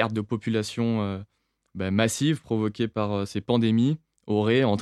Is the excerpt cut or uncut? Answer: uncut